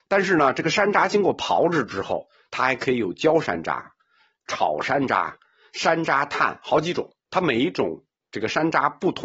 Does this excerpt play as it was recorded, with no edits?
yes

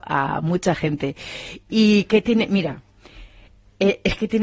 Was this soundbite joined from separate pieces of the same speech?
no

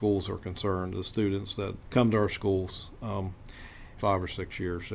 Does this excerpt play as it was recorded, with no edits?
no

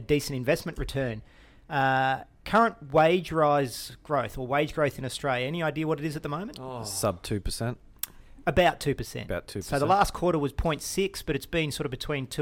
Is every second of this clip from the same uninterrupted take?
yes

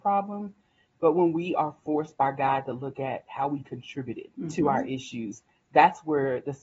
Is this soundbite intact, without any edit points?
no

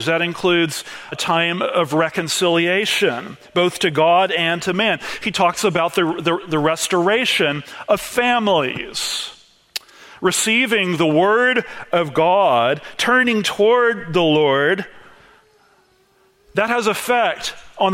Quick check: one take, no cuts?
no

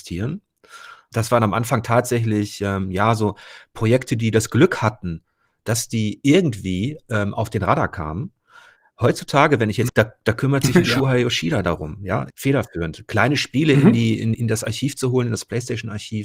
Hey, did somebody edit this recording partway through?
yes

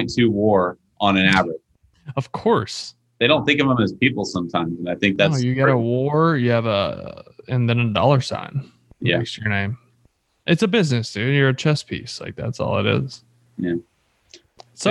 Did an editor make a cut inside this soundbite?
no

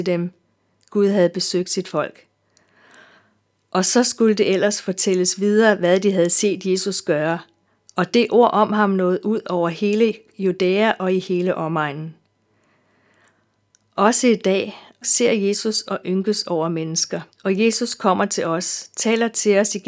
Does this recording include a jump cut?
yes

